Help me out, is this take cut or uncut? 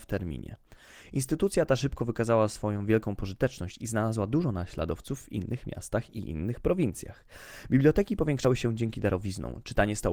uncut